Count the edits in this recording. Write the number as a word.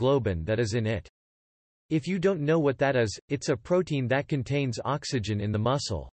zero